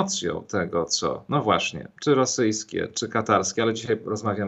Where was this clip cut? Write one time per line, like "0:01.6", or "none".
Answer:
none